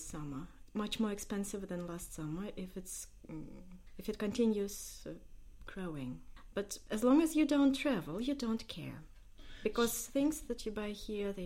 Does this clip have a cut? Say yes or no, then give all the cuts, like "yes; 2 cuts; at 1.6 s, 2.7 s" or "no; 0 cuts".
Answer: no; 0 cuts